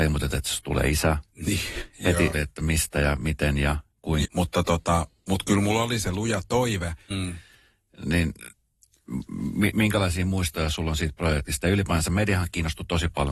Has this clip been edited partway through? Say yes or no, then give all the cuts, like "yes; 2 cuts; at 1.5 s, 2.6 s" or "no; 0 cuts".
yes; 3 cuts; at 2.3 s, 4.2 s, 7.1 s